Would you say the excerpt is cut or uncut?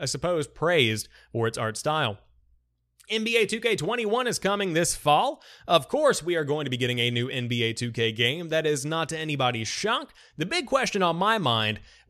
uncut